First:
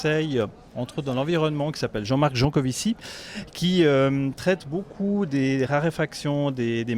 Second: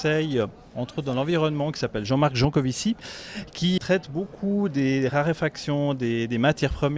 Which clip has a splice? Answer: second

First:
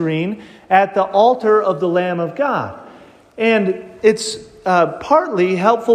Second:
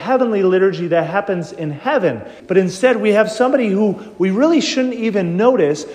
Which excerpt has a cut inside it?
second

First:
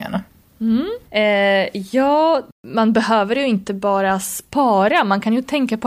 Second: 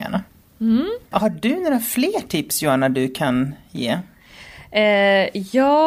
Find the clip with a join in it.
first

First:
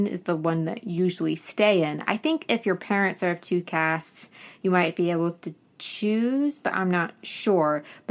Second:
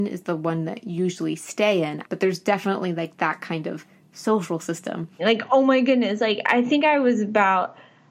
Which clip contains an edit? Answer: second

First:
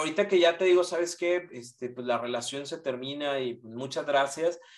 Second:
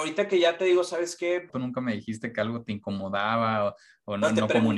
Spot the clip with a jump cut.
second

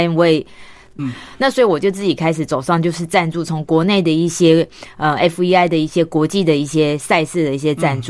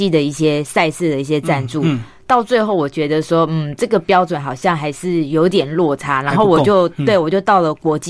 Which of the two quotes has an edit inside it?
first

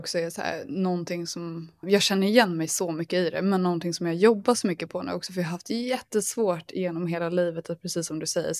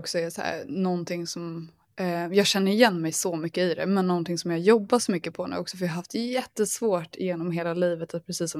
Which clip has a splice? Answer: first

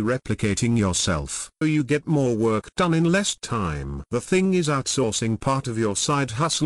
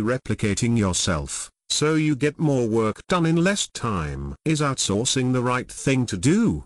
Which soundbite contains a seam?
first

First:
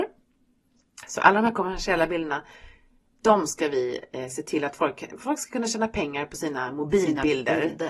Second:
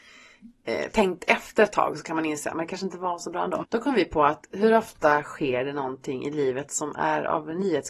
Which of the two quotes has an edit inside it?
second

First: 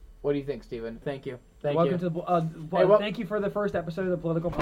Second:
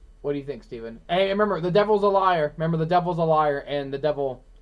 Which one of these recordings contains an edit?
first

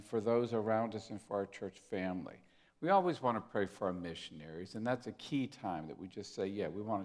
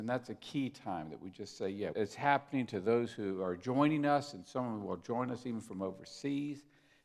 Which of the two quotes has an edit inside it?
second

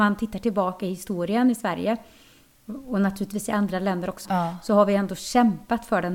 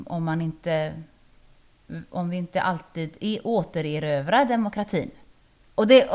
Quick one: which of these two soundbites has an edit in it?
first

